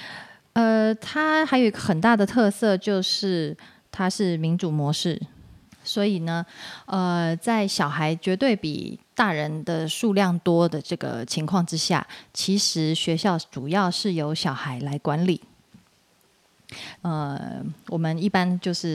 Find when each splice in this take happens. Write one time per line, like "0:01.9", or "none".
0:05.7
0:17.0